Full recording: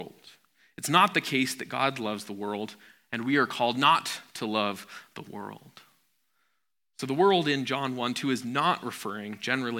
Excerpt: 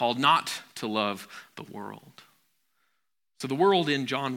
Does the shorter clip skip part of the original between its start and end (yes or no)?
no